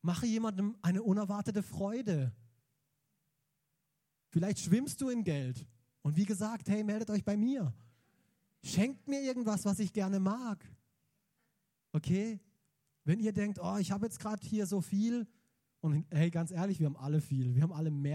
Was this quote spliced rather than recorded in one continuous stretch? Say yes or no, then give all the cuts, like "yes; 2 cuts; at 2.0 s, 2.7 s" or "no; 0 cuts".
no; 0 cuts